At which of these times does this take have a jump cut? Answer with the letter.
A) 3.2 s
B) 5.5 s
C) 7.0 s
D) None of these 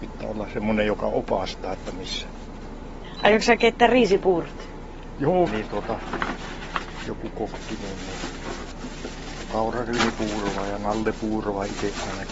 B